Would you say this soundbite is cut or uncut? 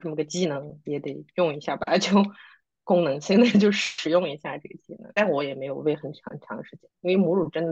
uncut